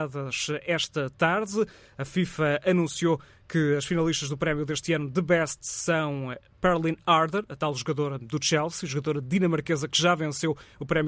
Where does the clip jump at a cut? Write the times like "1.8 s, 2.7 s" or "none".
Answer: none